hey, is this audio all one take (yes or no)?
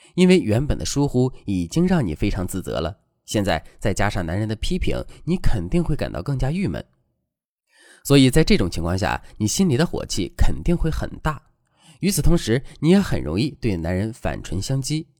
yes